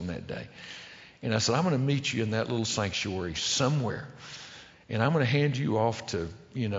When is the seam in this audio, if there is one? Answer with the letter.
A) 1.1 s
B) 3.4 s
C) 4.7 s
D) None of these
C